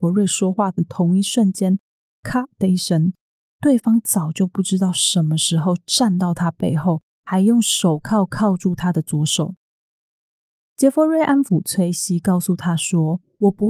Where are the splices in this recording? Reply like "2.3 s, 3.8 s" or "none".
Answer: none